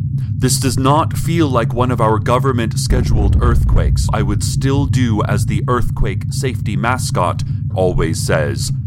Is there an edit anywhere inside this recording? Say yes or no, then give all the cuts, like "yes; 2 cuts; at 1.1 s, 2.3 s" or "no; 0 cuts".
yes; 2 cuts; at 4.1 s, 7.7 s